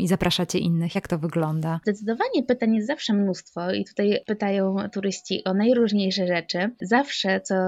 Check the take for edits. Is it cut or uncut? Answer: uncut